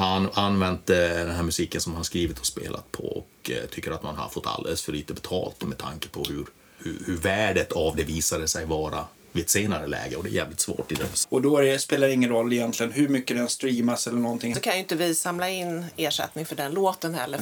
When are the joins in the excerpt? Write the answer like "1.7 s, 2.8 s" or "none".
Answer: 6.8 s, 11.2 s, 14.5 s